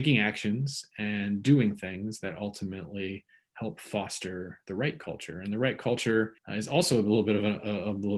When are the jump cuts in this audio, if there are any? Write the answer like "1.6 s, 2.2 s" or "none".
6.4 s

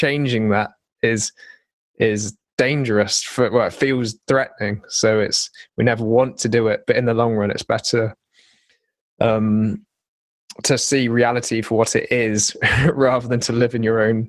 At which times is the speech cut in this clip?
none

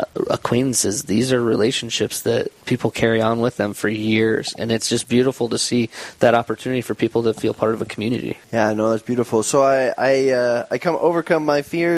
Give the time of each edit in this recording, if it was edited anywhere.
8.4 s

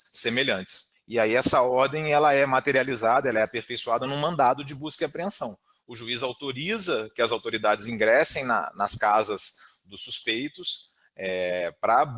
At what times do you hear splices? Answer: 0.9 s

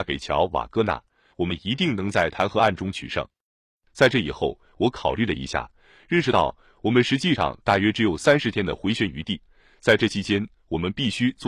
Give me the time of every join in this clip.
1.3 s

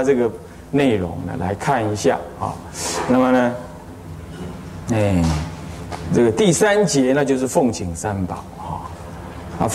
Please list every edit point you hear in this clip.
none

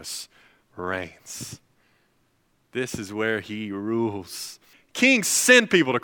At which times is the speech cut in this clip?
4.7 s

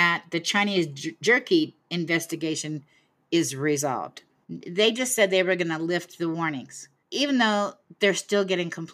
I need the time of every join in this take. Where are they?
4.4 s, 7.0 s

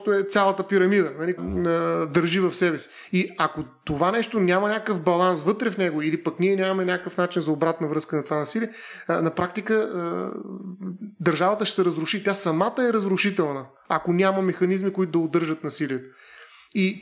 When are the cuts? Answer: 1.4 s

